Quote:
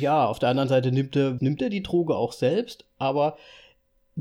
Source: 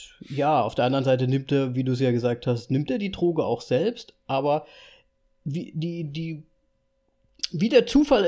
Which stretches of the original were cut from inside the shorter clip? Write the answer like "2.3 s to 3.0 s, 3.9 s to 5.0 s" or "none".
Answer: 1.7 s to 2.7 s

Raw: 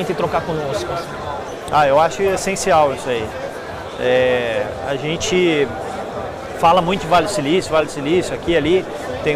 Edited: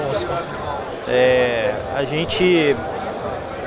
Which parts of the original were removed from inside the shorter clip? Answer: 1.6 s to 4.0 s

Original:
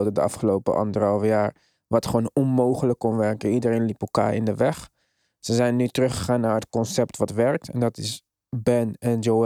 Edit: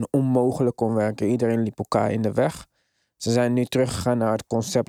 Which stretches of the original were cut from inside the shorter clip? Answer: none

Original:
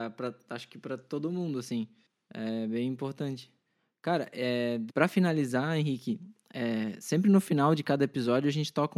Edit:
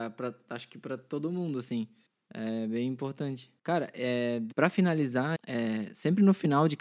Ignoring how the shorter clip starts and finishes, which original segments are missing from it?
3.6 s to 4.0 s, 5.7 s to 6.4 s

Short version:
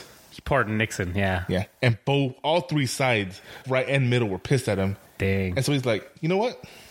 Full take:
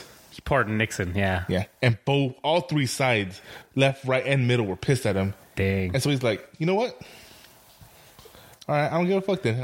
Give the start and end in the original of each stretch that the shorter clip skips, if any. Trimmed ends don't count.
3.6 s to 4.0 s

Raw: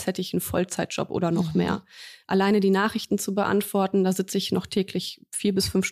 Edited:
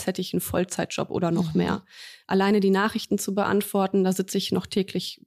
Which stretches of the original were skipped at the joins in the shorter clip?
none

